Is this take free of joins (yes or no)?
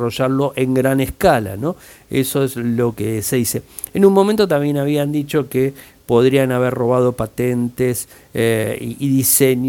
yes